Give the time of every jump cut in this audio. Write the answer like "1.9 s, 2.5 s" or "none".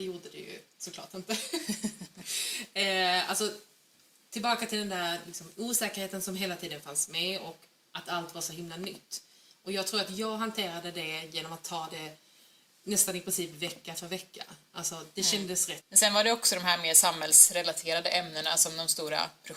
15.8 s